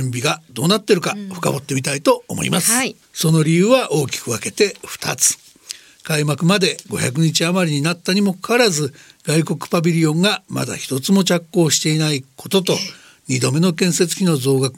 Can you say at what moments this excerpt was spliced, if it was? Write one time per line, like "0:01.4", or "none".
0:03.0